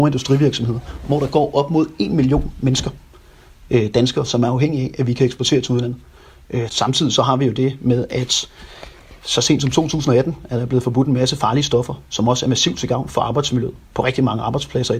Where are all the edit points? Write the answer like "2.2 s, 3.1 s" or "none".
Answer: 6.7 s